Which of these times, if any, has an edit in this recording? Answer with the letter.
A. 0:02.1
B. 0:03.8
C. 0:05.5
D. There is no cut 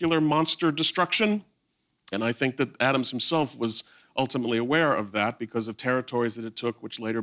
A